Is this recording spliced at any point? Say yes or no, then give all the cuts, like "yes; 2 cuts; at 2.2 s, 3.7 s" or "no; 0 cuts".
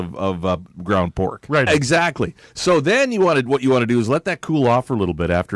yes; 1 cut; at 1.7 s